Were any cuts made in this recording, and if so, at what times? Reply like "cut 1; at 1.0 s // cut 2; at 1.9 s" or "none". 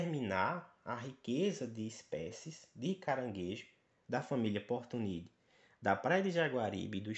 none